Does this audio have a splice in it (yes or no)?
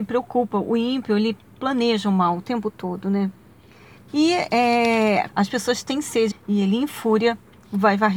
yes